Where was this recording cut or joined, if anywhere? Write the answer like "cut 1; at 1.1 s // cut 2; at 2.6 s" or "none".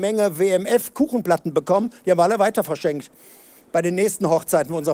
none

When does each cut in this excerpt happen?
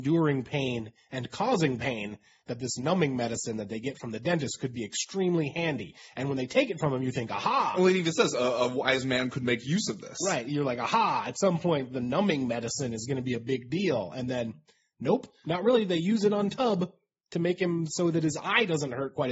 none

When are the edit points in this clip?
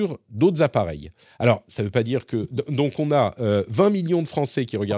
none

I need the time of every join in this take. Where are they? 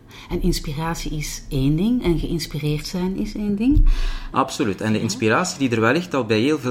cut 1; at 4.3 s

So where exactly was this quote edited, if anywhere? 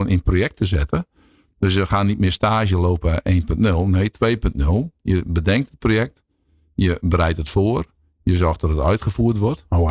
none

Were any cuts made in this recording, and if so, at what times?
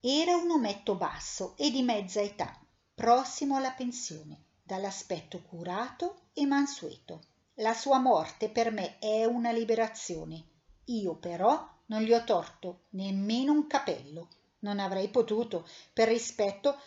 cut 1; at 7.4 s

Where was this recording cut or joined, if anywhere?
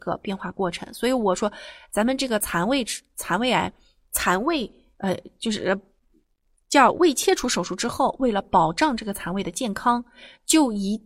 none

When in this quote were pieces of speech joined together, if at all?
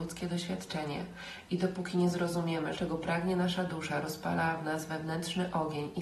cut 1; at 2.8 s

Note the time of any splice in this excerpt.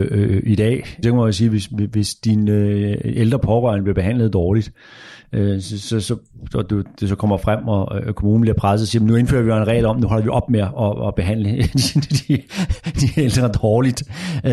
cut 1; at 1.0 s

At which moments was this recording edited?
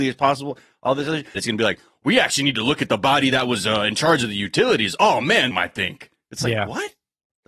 cut 1; at 1.4 s // cut 2; at 5.5 s

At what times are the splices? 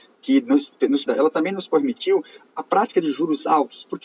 cut 1; at 1.1 s

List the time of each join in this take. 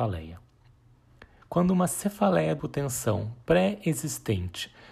cut 1; at 1.4 s // cut 2; at 2.6 s

